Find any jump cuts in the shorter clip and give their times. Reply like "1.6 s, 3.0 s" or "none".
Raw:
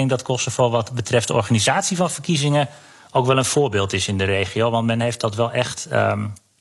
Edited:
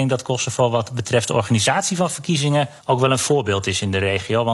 2.8 s